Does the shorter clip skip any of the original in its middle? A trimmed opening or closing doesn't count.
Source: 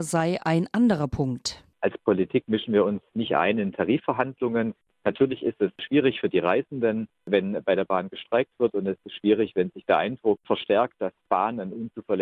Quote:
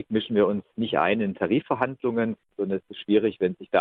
yes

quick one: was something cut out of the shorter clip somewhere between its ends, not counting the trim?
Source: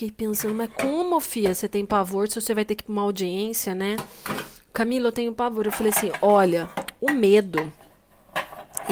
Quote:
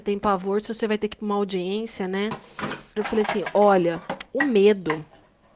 yes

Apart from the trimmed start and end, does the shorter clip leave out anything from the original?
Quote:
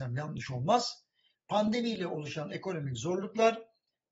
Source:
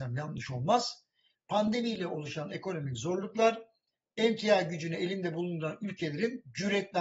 no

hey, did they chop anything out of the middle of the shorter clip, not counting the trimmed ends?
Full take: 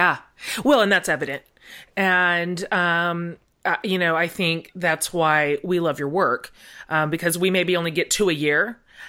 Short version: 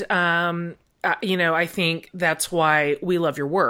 no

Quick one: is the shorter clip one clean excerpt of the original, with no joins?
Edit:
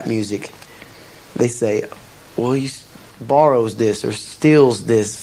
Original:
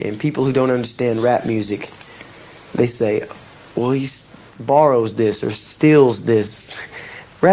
yes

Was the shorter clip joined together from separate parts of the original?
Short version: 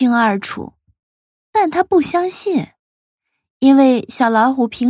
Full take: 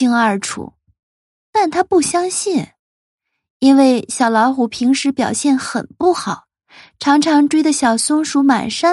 no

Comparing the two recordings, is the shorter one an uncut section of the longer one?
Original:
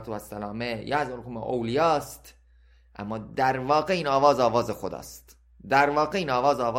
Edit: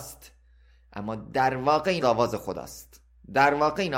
no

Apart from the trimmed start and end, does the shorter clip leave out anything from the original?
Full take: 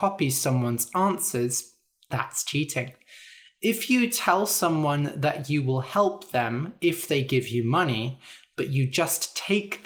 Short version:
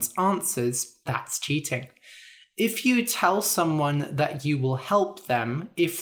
yes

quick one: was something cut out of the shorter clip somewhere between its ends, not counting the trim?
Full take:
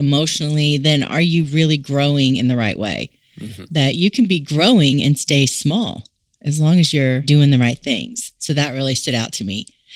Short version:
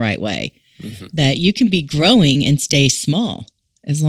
no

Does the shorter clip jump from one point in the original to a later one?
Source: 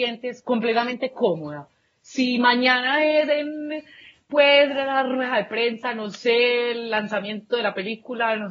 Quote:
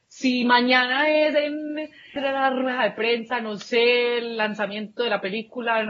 yes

